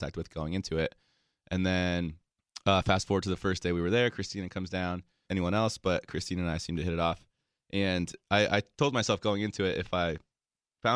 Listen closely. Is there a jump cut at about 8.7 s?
no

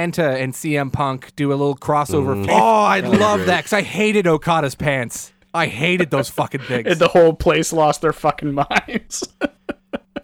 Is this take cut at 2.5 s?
yes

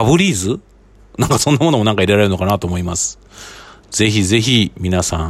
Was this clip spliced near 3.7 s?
no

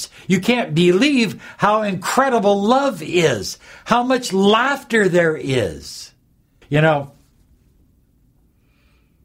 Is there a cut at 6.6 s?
yes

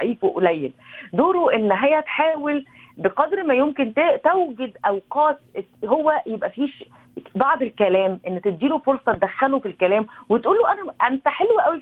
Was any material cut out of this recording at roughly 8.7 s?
no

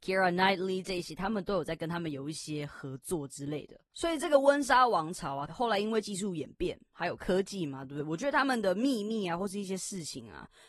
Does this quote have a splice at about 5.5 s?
yes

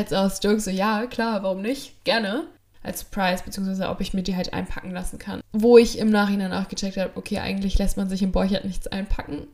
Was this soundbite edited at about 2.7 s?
yes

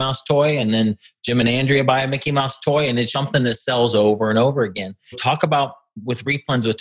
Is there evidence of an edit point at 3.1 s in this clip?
yes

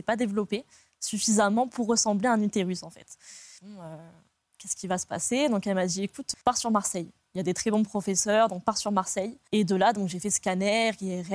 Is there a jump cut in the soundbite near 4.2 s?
no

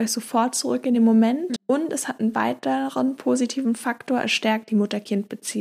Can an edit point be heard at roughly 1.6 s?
yes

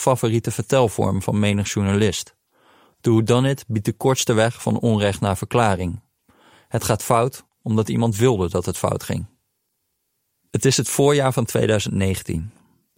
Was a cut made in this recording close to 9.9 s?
no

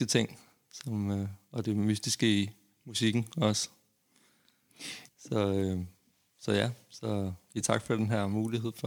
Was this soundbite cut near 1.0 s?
no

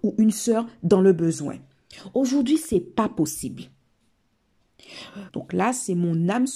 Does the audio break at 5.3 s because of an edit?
yes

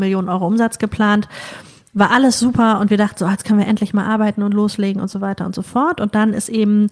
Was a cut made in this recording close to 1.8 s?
no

